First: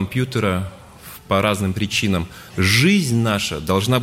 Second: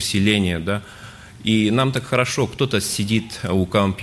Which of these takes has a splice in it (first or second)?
first